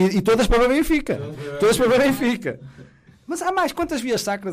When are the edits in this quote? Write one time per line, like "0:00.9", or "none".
none